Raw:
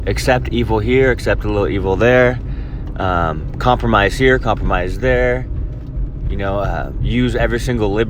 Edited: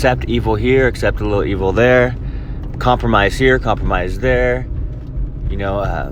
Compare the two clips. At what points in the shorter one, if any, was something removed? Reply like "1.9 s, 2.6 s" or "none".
2.7 s

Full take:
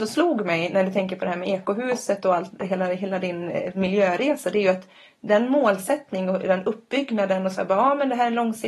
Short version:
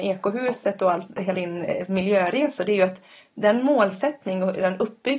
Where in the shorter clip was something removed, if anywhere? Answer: 1.3 s

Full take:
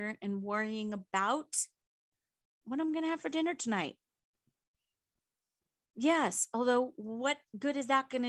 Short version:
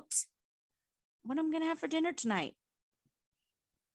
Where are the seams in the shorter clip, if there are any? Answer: none

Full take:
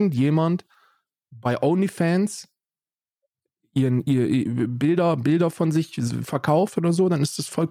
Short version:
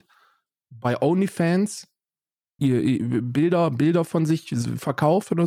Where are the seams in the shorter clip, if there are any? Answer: 2.6 s

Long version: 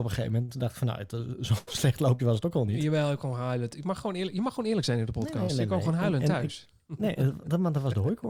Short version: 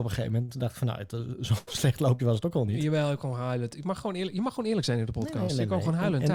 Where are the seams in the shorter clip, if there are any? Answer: none

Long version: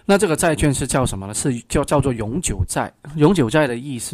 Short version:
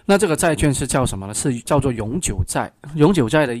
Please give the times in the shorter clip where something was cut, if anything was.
1.7 s

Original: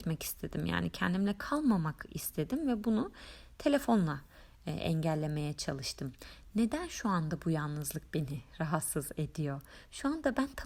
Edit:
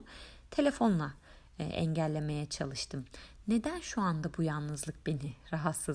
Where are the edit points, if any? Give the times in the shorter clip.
none

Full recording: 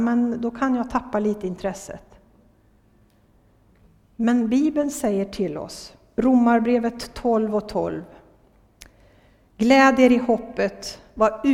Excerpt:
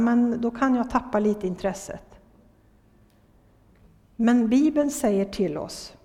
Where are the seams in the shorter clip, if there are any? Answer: none

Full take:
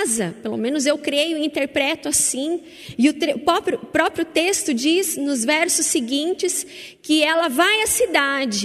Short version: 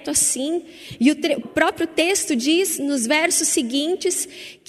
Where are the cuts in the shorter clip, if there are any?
1.4 s

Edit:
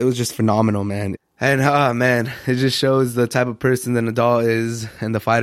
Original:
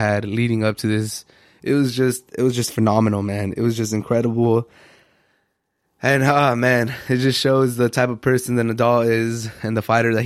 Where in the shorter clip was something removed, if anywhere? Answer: 1.2 s

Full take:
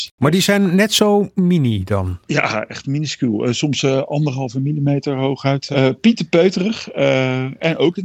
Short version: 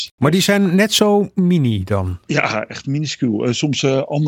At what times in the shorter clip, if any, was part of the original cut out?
none

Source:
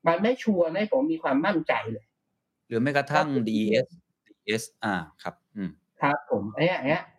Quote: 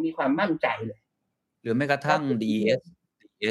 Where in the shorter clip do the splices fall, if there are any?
none

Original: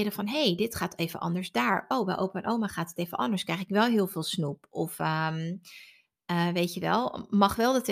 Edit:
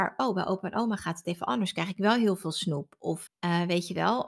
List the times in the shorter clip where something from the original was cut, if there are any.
3.3 s

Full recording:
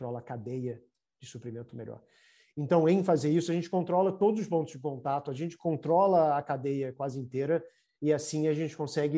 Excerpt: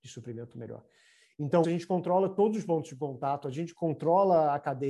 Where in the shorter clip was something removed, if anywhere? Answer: 1.6 s

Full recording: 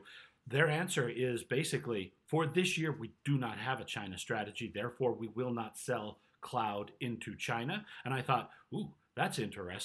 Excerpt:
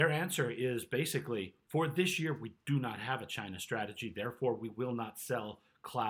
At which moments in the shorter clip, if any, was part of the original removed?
none

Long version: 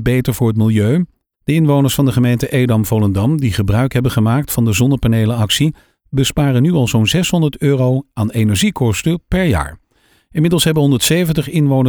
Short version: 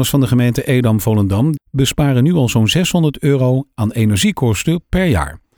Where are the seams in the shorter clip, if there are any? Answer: 1.6 s

